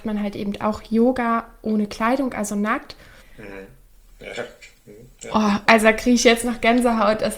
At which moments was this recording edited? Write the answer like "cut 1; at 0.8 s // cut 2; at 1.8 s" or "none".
cut 1; at 3.2 s // cut 2; at 5.7 s